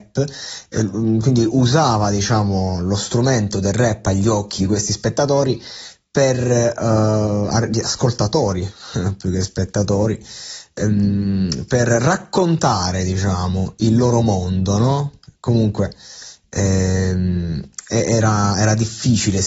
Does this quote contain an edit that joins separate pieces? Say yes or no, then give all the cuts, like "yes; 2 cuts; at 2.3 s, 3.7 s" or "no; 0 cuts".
yes; 1 cut; at 4.6 s